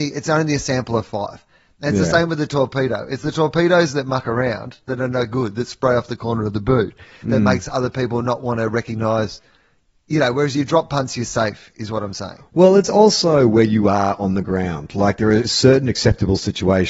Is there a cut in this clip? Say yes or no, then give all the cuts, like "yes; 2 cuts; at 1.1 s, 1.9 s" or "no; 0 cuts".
no; 0 cuts